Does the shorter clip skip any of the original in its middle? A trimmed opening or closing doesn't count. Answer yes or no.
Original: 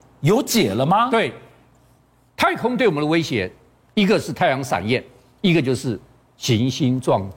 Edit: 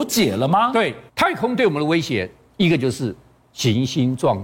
yes